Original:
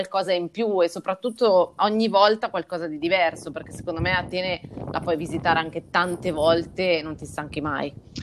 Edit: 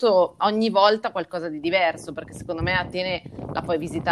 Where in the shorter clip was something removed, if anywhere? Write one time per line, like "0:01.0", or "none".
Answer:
none